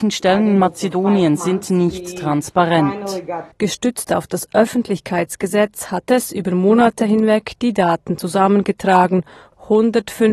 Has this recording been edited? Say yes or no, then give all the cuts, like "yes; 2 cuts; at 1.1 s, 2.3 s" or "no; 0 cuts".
yes; 1 cut; at 3.5 s